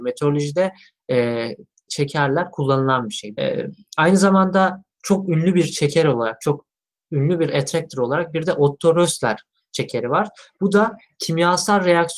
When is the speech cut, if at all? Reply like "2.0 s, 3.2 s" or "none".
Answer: 1.9 s, 3.4 s